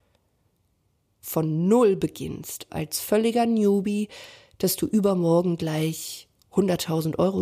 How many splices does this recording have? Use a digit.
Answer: 1